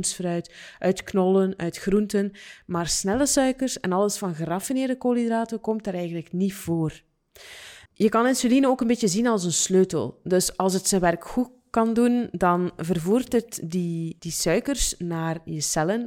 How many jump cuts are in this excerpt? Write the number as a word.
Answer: two